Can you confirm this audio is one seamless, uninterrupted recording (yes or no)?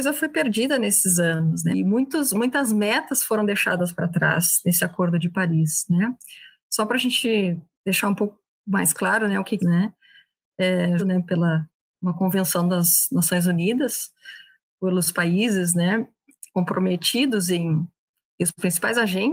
no